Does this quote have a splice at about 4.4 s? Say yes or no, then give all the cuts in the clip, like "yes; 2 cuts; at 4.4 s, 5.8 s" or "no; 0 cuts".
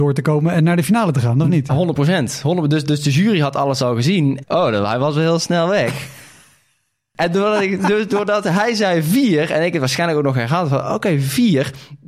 yes; 2 cuts; at 1.7 s, 4.4 s